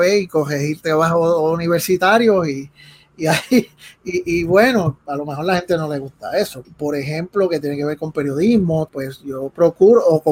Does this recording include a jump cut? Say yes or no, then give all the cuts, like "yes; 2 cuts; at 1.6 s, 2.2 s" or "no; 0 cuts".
yes; 3 cuts; at 5.0 s, 6.6 s, 8.9 s